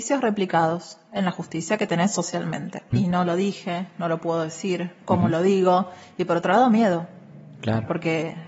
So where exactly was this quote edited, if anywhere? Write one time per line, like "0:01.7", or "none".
0:02.9